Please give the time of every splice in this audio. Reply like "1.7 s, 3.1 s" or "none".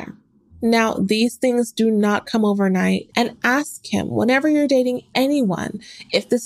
3.1 s